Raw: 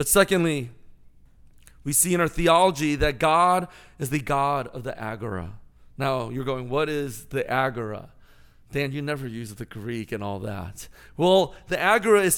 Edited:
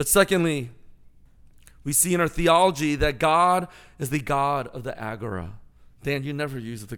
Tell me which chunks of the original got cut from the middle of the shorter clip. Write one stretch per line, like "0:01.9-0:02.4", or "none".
0:05.9-0:08.6